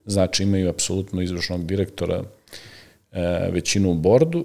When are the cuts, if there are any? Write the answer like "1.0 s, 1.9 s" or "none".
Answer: none